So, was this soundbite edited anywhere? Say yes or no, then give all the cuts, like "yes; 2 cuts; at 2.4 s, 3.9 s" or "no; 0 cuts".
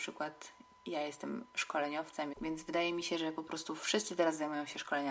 yes; 1 cut; at 2.3 s